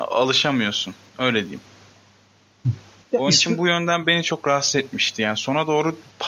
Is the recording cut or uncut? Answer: uncut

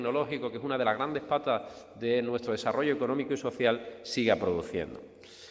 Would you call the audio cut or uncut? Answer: uncut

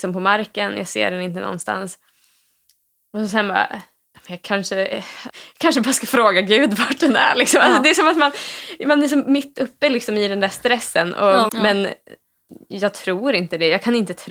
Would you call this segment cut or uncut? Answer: cut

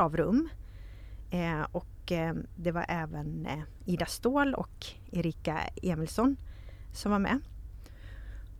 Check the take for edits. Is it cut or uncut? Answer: uncut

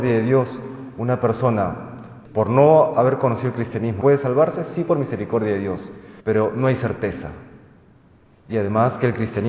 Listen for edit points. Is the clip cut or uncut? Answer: cut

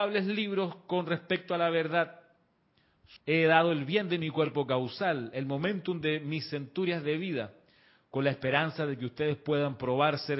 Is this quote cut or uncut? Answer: cut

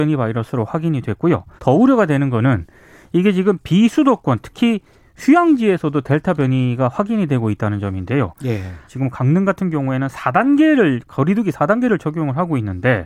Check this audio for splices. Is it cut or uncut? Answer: cut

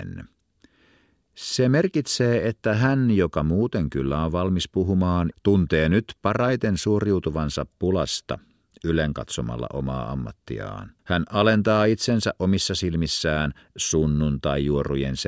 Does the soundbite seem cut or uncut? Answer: cut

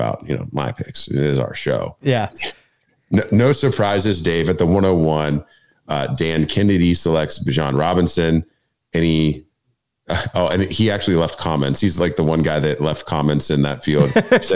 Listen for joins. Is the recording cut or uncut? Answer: cut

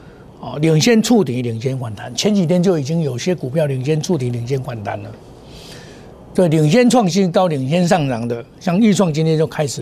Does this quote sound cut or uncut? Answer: uncut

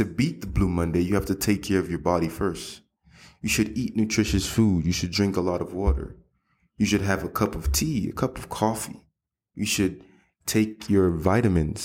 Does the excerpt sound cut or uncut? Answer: uncut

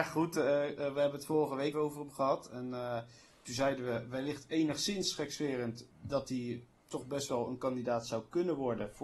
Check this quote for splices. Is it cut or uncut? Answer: cut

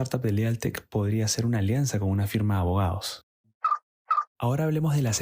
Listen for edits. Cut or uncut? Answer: cut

